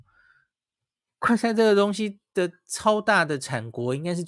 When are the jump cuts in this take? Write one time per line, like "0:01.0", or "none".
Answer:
none